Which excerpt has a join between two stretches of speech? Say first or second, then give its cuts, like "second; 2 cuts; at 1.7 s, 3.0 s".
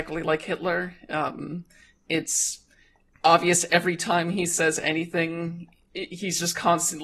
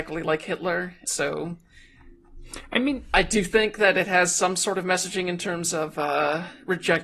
second; 1 cut; at 1.0 s